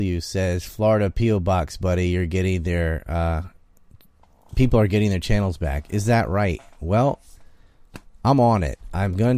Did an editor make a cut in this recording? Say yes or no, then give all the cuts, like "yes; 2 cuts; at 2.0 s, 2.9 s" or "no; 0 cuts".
no; 0 cuts